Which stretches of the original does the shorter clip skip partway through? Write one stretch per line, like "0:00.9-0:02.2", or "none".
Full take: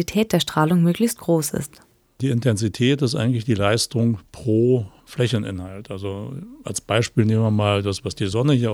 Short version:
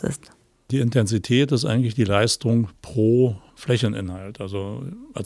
none